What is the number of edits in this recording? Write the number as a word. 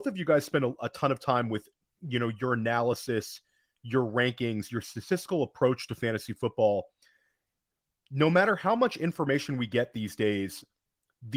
zero